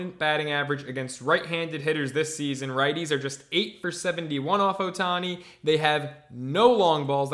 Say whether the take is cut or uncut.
uncut